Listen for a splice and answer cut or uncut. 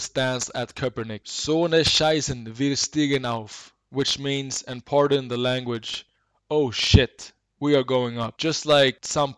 cut